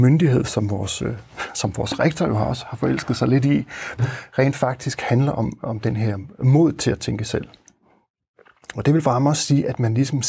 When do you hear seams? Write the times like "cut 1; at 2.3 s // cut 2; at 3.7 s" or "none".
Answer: cut 1; at 4.0 s